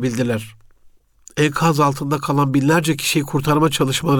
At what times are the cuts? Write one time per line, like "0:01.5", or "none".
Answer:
0:01.2